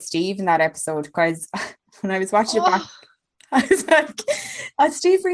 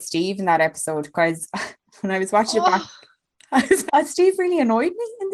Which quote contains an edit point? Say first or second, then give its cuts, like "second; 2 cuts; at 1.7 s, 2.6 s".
second; 1 cut; at 3.9 s